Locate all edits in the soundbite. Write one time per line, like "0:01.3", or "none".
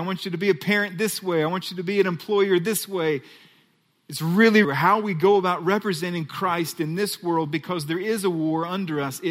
0:04.6